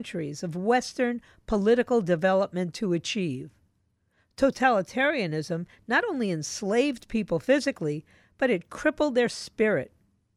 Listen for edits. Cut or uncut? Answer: uncut